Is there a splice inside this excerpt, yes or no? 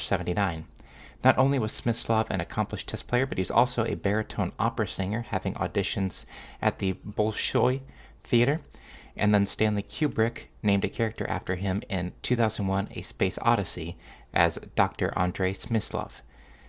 no